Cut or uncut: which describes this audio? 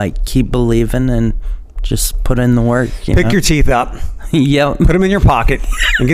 uncut